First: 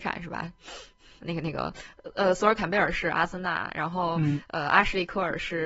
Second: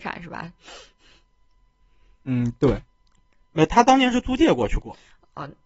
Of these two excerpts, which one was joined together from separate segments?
first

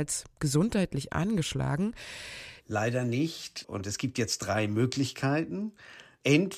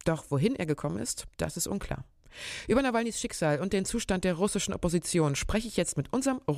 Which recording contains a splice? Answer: first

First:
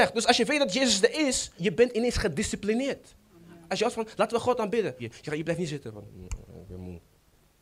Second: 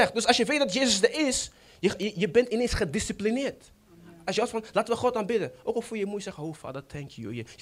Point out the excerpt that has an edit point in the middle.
first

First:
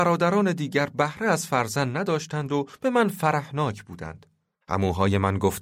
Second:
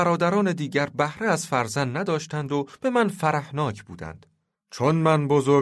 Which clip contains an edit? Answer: first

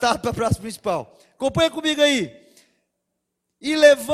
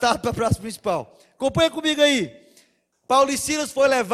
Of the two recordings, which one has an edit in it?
second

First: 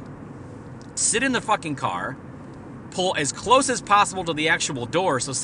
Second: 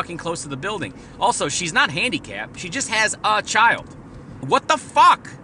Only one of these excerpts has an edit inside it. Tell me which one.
second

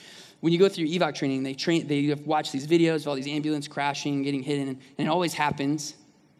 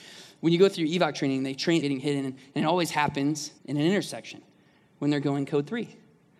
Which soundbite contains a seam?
second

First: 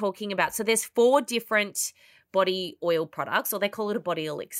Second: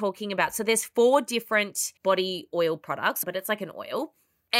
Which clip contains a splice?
second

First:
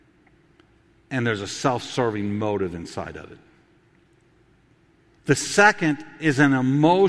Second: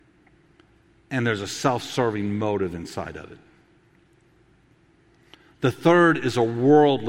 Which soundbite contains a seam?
first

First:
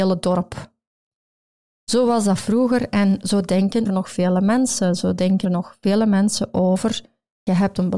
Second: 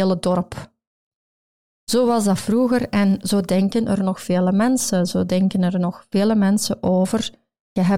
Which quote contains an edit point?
first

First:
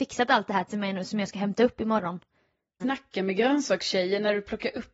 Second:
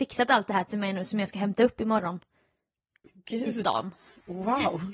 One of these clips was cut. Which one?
first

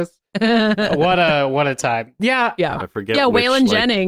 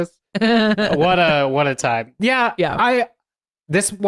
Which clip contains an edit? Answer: first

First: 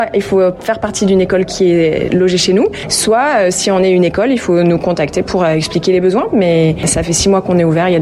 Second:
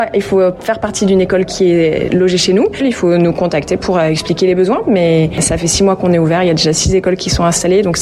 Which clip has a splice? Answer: second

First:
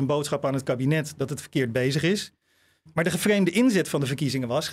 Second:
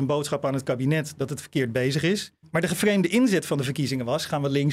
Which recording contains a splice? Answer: second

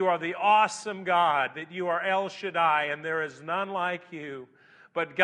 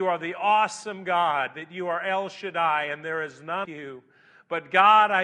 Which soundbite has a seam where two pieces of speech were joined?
second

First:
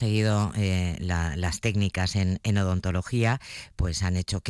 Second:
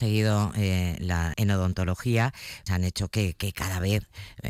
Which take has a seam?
second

